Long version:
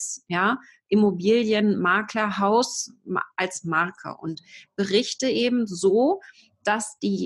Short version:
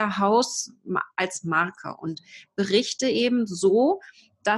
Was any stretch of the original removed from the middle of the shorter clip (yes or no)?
no